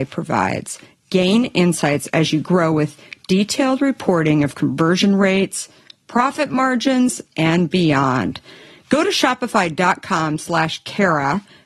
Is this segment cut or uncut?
uncut